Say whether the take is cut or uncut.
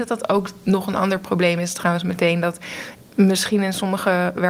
uncut